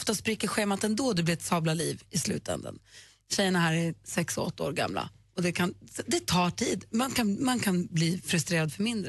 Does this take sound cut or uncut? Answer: uncut